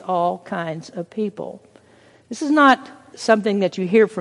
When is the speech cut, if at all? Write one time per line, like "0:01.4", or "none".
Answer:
0:03.1